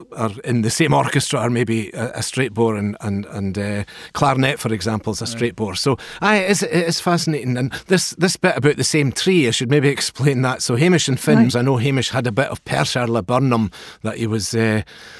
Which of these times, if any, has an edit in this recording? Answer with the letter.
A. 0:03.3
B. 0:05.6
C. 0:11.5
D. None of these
C